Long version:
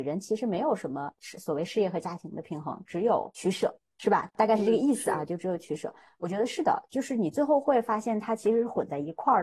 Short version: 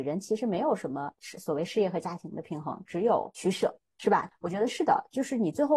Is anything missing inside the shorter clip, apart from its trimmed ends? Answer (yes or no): yes